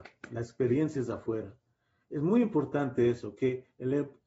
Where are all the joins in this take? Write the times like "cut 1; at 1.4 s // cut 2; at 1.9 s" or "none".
none